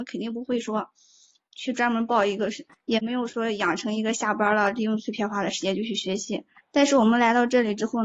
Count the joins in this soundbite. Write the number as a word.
two